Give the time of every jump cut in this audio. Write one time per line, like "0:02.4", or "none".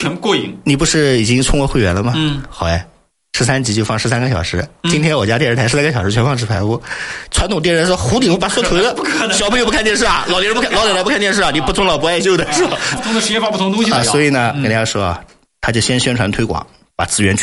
0:13.0